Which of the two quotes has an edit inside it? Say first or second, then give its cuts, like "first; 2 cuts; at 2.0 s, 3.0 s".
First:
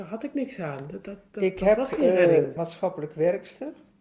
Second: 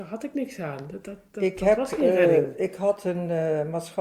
first; 1 cut; at 2.6 s